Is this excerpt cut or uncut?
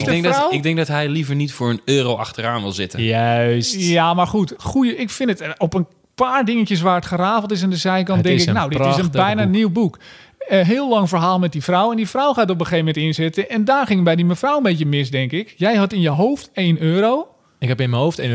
cut